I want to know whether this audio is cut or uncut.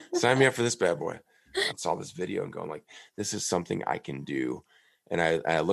cut